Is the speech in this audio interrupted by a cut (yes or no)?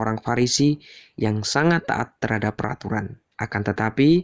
yes